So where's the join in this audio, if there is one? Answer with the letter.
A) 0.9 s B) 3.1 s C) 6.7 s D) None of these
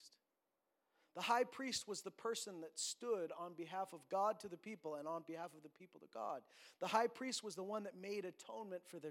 D